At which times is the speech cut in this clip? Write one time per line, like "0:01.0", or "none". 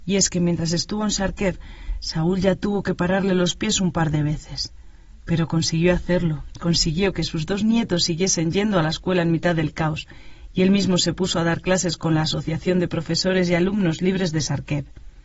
none